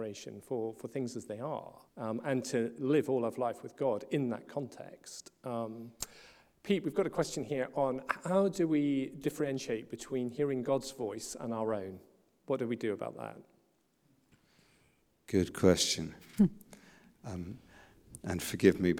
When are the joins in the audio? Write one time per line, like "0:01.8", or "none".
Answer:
0:01.9